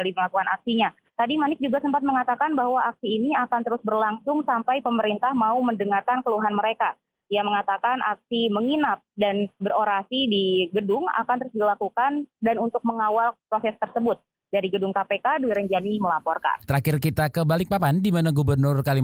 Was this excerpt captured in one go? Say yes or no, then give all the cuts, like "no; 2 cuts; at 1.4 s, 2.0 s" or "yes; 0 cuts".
no; 3 cuts; at 1.0 s, 9.6 s, 16.7 s